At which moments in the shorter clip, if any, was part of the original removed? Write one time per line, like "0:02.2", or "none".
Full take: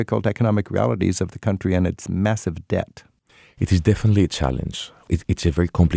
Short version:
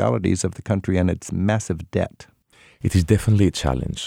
none